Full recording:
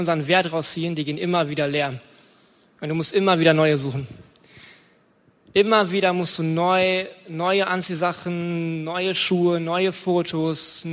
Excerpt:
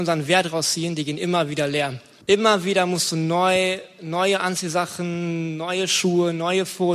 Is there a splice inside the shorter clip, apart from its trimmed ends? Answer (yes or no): yes